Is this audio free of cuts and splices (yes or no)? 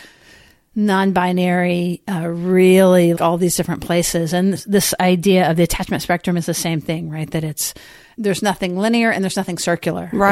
no